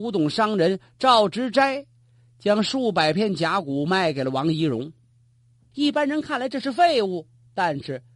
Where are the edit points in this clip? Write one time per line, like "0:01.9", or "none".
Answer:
0:05.7